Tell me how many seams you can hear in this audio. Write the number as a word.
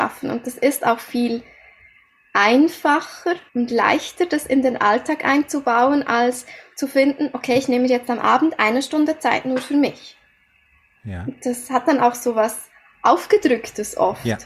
one